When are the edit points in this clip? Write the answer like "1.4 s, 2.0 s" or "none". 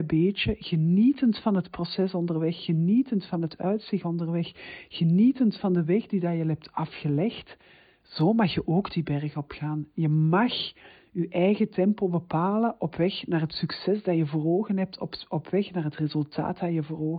none